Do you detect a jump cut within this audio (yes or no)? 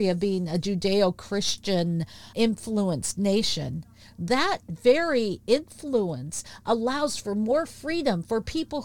no